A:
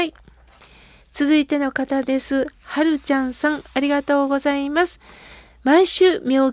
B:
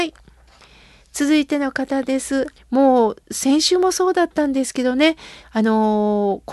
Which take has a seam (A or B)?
B